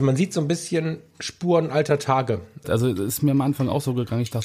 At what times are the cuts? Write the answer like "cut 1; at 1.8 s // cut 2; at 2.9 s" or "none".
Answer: cut 1; at 2.6 s